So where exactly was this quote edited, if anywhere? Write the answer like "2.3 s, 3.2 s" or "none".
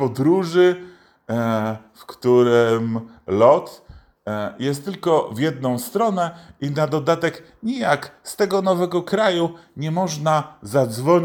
none